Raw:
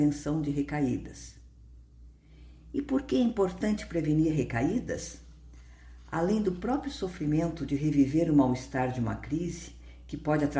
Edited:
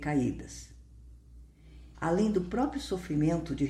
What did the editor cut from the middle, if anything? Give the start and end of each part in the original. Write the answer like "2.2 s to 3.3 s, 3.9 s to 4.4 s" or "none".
2.6 s to 6.1 s